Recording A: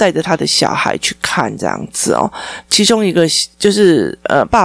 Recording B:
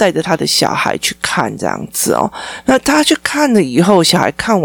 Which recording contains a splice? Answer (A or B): A